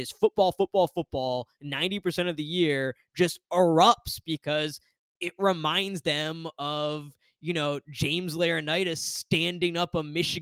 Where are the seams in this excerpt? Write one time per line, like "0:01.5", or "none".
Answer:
none